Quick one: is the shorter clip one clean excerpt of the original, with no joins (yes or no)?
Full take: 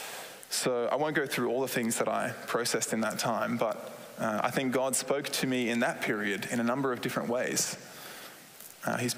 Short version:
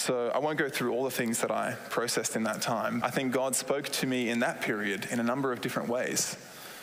no